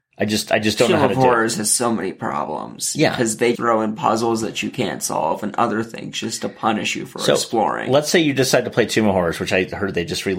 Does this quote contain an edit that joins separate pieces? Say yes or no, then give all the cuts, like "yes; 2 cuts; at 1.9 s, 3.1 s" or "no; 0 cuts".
yes; 1 cut; at 3.5 s